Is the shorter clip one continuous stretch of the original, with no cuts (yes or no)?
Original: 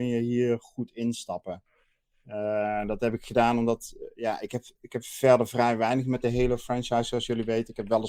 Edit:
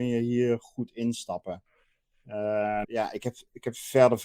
no